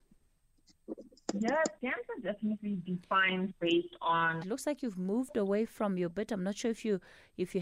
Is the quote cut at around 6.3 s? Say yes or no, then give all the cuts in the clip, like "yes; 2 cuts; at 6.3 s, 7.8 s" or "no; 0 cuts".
no; 2 cuts; at 1.7 s, 4.4 s